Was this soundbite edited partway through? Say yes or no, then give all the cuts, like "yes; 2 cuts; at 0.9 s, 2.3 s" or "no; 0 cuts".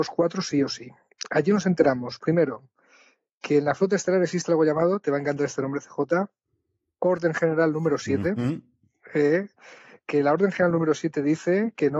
no; 0 cuts